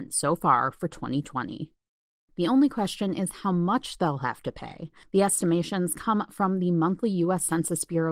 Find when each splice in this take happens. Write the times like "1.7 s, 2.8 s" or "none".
2.3 s, 5.0 s